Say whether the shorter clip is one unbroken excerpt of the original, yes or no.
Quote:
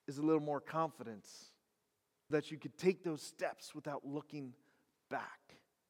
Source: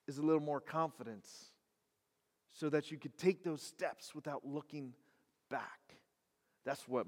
no